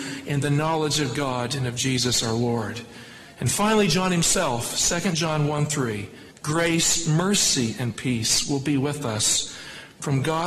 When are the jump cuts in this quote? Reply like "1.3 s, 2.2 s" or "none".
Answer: 6.3 s